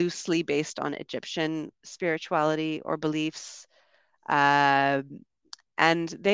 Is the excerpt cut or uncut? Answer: cut